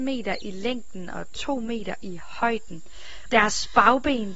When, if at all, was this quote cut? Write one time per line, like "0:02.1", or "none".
0:03.3